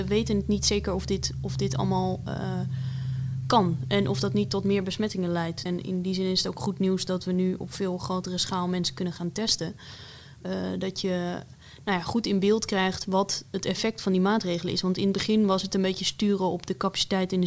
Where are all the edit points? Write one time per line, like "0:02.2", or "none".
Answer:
0:05.7